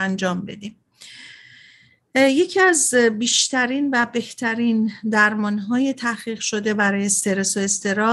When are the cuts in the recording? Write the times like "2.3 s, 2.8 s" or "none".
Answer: none